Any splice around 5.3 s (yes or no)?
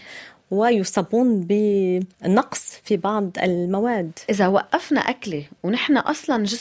no